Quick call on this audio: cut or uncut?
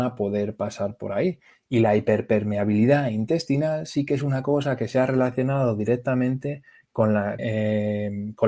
cut